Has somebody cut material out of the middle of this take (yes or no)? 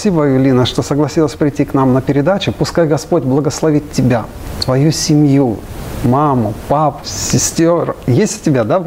yes